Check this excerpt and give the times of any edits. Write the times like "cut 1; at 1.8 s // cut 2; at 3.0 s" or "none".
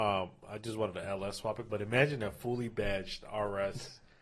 none